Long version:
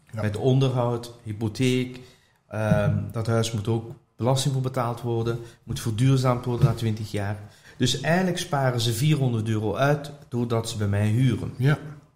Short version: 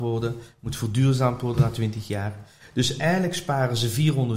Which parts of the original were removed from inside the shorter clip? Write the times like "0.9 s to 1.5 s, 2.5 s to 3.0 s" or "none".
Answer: none